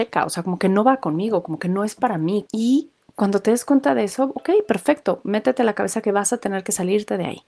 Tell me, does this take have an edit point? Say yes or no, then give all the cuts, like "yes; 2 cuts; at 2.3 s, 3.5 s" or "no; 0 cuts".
yes; 1 cut; at 2.5 s